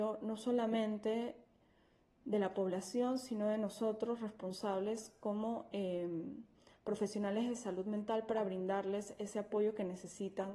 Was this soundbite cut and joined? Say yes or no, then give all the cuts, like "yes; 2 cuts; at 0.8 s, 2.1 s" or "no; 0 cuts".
no; 0 cuts